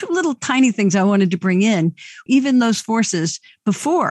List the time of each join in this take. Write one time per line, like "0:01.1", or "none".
0:02.3